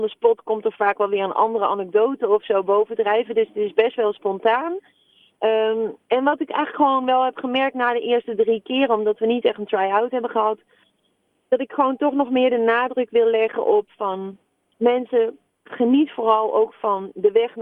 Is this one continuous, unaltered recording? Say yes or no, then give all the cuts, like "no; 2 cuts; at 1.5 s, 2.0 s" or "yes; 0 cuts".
yes; 0 cuts